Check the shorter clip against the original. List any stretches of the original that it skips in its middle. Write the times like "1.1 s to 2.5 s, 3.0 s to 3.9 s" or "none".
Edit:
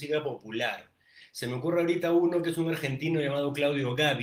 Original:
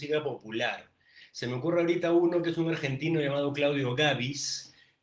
none